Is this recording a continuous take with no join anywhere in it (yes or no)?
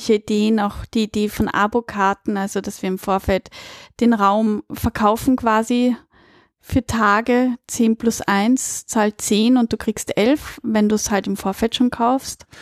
yes